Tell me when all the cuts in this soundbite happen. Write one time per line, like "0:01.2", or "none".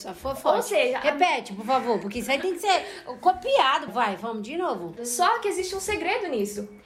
0:03.9
0:05.0